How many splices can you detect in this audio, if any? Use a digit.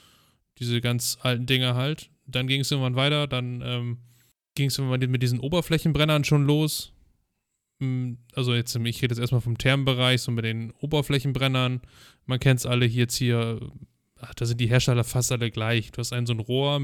0